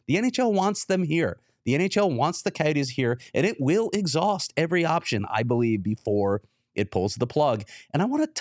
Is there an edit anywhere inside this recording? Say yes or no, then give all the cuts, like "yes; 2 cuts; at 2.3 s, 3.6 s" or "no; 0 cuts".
no; 0 cuts